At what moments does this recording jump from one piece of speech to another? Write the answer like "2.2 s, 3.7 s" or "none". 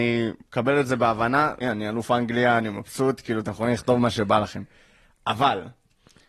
1.6 s